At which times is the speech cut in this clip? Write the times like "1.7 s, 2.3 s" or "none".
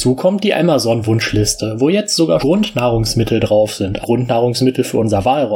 2.4 s, 4.0 s

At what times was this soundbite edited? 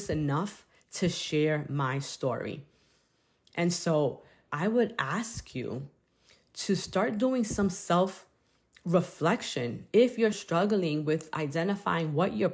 4.5 s, 10.3 s

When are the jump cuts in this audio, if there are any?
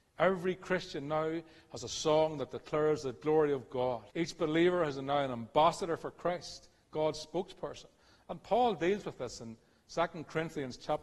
4.1 s

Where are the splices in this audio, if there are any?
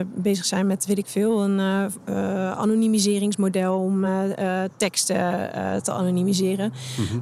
none

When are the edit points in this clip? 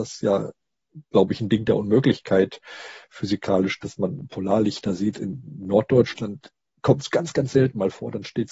none

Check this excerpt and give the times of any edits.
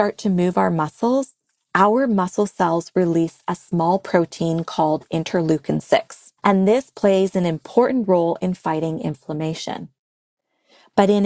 6.4 s

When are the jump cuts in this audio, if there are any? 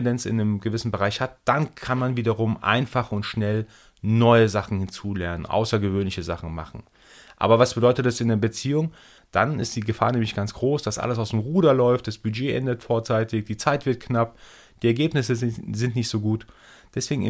9.2 s

